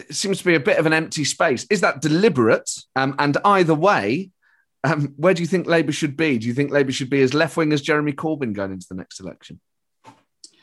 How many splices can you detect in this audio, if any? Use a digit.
1